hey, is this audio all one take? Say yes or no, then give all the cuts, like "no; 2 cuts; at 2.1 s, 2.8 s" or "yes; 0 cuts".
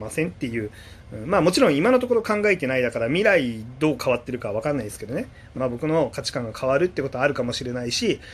no; 1 cut; at 5.5 s